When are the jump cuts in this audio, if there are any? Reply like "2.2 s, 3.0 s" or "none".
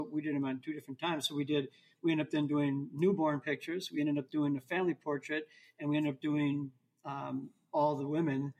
none